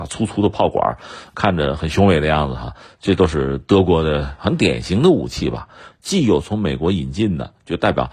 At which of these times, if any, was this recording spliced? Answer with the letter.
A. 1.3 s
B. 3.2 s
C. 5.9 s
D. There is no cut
C